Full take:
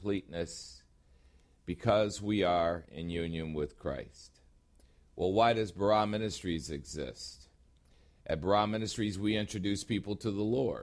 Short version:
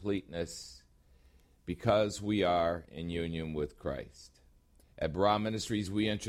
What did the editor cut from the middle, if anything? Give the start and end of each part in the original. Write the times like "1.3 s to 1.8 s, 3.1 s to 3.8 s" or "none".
4.8 s to 8.1 s